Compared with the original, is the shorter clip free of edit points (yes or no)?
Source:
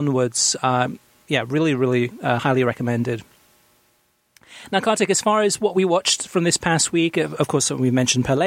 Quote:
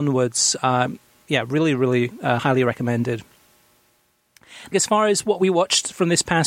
no